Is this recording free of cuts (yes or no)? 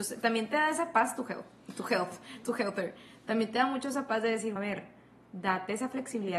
no